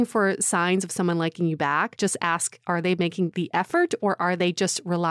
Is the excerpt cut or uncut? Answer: uncut